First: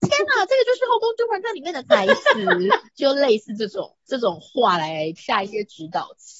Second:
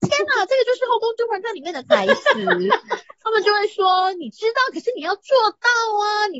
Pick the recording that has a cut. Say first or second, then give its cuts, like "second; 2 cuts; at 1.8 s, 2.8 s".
first; 3 cuts; at 2.9 s, 4.0 s, 5.2 s